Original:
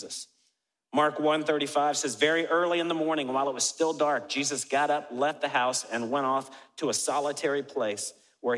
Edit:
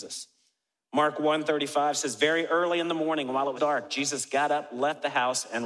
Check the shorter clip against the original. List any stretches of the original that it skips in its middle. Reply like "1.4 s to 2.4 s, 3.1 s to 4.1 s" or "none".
3.6 s to 3.9 s